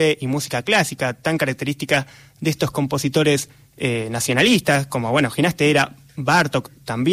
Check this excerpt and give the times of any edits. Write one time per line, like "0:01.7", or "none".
none